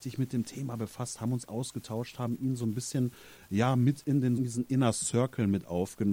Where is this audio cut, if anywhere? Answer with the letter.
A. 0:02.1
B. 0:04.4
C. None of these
B